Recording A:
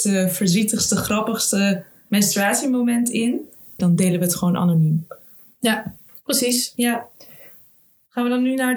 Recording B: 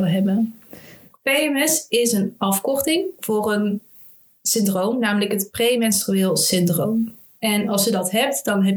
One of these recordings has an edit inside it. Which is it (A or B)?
A